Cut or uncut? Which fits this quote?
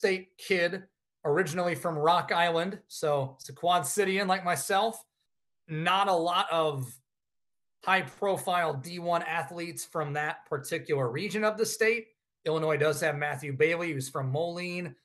uncut